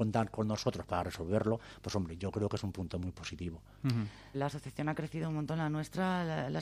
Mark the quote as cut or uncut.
cut